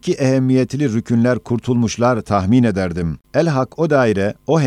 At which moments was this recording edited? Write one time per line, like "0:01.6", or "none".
0:03.2